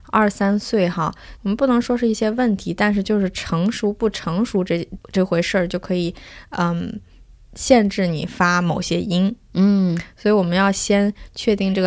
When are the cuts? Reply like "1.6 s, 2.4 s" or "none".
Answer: 1.4 s, 5.0 s